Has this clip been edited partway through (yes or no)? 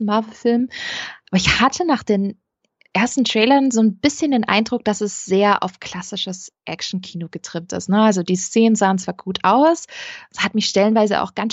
no